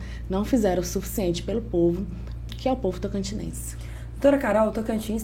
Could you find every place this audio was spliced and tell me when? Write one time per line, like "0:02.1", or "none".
0:02.5